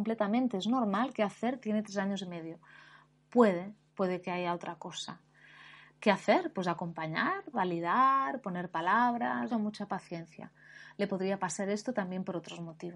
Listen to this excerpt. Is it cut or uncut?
cut